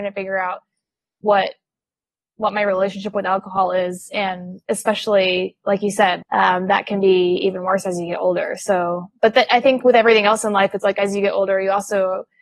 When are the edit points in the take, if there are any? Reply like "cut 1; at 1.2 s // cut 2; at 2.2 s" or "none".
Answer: cut 1; at 4.6 s // cut 2; at 6.2 s

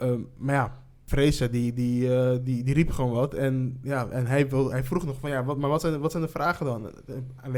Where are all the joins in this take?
none

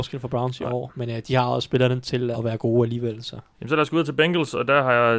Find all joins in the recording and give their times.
cut 1; at 2.3 s // cut 2; at 3.5 s

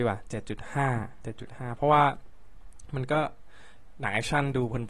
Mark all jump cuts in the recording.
cut 1; at 1.2 s

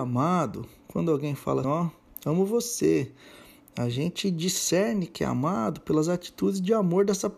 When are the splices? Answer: cut 1; at 1.6 s

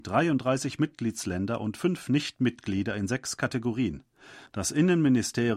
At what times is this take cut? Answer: cut 1; at 4.5 s

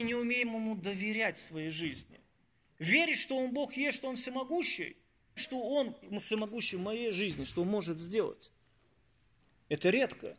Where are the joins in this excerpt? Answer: cut 1; at 5.4 s

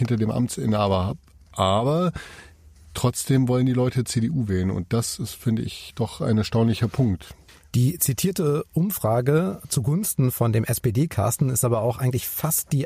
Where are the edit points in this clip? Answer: none

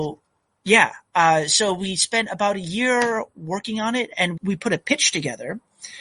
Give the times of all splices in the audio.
cut 1; at 4.4 s

